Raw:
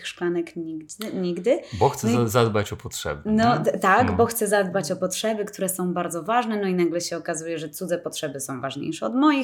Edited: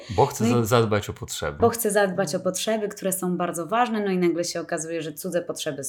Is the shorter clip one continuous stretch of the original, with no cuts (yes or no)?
no